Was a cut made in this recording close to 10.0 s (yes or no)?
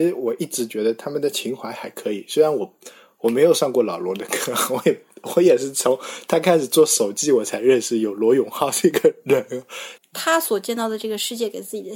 yes